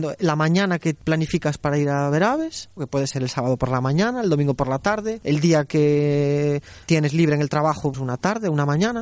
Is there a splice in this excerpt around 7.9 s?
yes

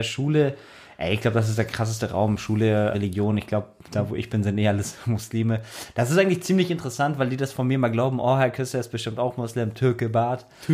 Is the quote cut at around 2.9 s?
yes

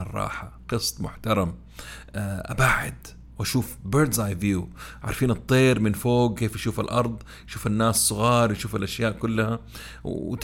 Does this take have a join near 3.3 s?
yes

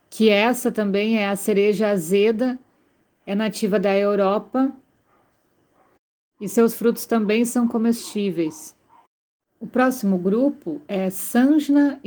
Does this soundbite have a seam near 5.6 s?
no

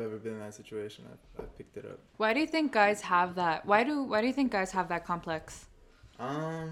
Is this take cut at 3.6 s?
no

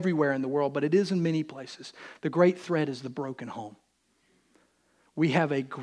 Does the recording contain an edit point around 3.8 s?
no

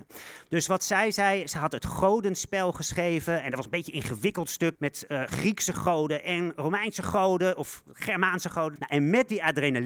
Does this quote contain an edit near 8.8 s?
yes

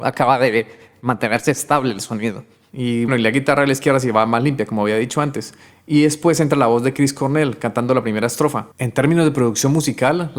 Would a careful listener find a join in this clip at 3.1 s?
yes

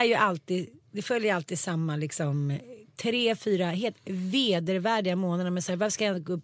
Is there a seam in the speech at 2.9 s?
yes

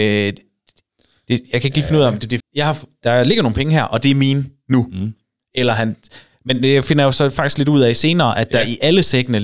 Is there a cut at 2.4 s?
yes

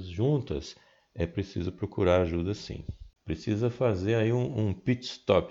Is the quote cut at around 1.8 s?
no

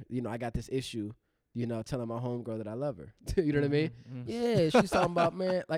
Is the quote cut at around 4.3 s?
yes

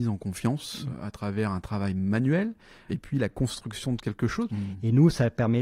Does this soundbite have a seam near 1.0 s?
no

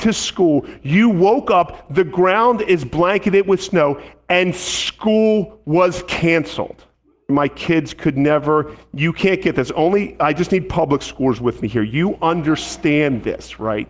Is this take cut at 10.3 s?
no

